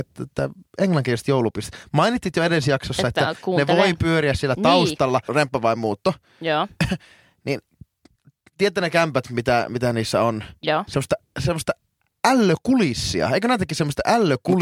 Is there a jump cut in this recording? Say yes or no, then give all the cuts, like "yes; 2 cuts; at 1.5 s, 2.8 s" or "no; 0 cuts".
yes; 1 cut; at 5.3 s